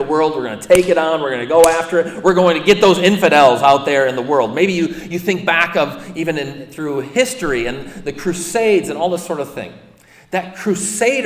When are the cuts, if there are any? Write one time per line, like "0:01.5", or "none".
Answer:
none